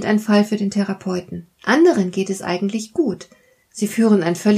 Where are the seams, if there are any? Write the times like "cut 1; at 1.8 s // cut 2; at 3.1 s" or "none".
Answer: cut 1; at 1.5 s

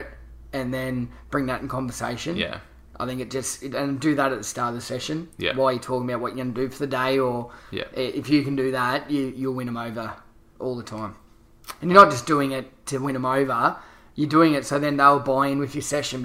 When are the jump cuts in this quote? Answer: none

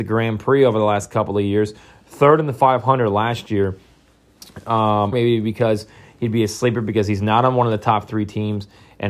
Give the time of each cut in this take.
cut 1; at 5.1 s

